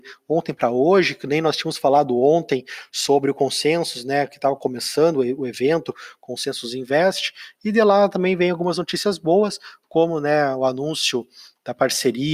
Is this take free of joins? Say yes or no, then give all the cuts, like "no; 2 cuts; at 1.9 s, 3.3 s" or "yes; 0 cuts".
yes; 0 cuts